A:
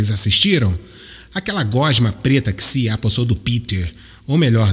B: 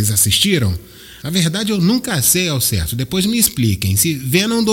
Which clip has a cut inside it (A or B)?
B